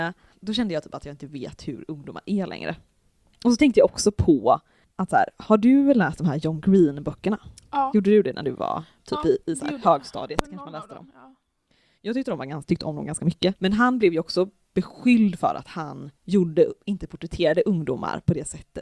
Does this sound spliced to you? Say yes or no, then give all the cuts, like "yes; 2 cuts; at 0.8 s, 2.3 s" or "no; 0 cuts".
yes; 2 cuts; at 13.5 s, 16.1 s